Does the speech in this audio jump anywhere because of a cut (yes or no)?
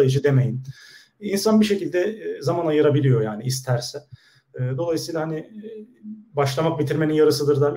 no